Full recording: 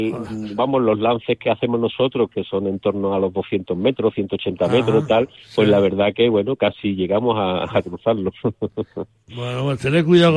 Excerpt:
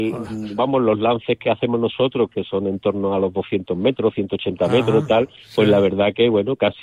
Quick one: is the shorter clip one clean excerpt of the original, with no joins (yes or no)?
yes